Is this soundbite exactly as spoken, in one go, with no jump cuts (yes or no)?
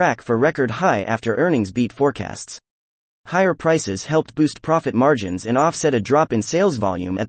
yes